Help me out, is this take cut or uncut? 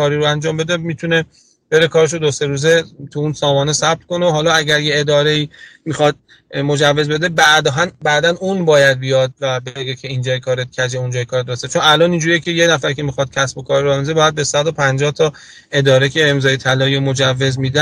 uncut